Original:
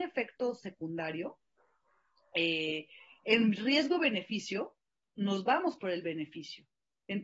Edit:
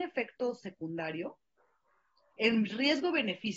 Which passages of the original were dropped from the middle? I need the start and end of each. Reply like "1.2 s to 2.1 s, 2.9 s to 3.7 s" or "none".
2.3 s to 3.2 s

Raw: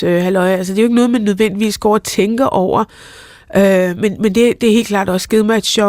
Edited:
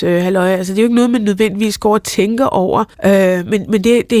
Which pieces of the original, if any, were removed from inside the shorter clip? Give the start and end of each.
2.9 s to 3.4 s

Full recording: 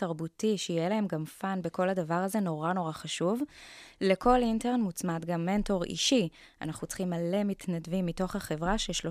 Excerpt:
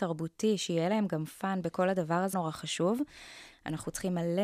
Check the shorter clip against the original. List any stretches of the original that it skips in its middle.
2.3 s to 2.7 s, 3.9 s to 6.5 s

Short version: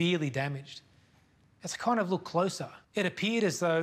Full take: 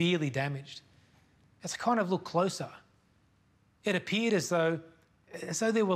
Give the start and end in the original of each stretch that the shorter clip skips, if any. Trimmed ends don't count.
2.8 s to 3.7 s

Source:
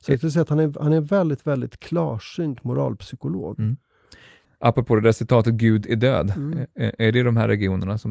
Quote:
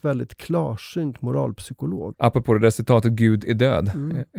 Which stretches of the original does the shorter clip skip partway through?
3.6 s to 4.6 s

